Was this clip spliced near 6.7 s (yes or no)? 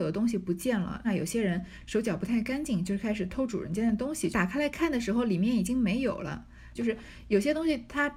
yes